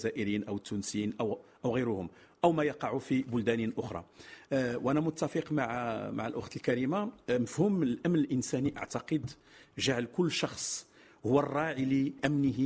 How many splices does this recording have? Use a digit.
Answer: 0